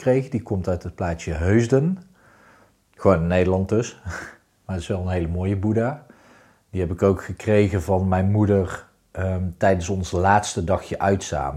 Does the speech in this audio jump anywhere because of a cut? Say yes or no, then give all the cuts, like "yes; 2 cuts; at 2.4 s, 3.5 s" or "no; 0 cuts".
no; 0 cuts